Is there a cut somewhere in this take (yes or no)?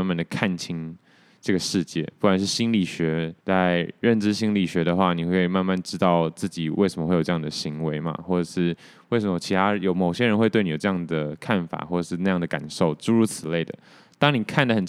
yes